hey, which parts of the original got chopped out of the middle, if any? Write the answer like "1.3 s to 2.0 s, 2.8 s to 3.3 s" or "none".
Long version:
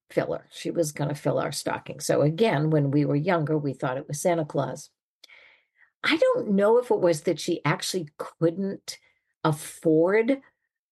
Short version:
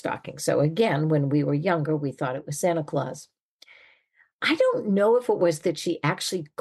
none